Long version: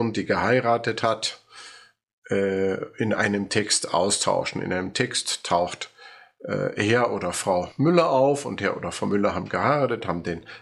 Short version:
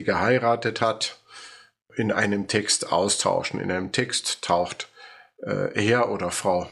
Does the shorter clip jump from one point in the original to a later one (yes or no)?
yes